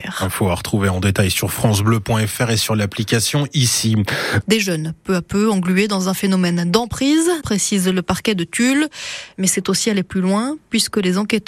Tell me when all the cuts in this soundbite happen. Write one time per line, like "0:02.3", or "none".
0:04.4
0:07.4